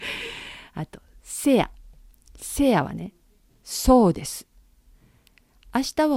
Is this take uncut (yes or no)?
yes